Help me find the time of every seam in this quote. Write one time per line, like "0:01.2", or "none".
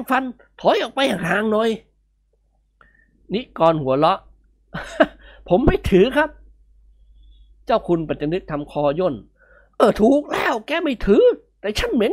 0:09.8